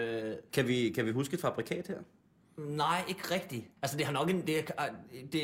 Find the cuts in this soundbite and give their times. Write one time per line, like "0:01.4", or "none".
0:03.8